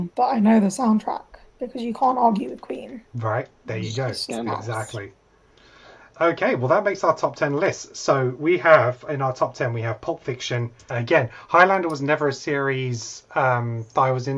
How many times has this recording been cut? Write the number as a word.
two